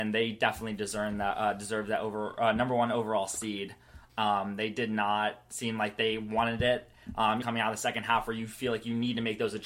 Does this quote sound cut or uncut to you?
cut